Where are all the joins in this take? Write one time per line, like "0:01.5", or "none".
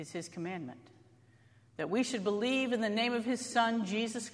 none

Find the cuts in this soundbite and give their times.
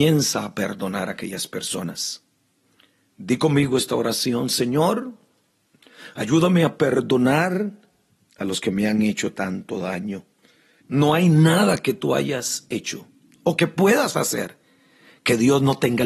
0:10.8

